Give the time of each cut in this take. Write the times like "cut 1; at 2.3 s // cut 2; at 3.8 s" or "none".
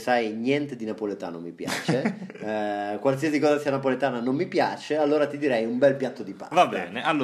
none